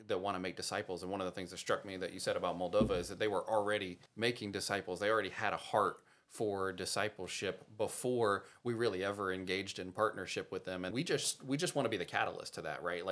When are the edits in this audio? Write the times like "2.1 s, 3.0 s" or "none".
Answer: 4.1 s, 10.9 s